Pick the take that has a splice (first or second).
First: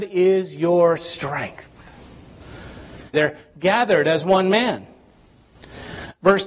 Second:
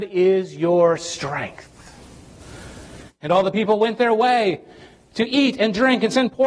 first